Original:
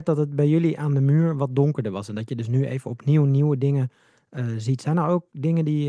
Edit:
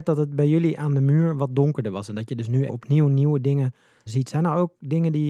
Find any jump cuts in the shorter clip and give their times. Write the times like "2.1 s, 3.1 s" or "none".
2.7 s, 4.1 s